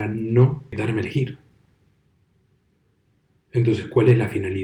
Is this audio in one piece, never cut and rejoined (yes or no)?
yes